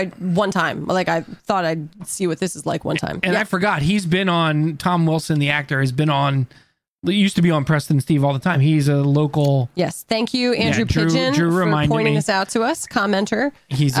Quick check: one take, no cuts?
yes; 0 cuts

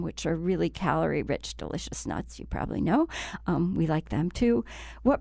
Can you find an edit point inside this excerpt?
no; 0 cuts

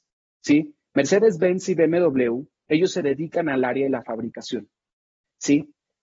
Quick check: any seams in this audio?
no; 0 cuts

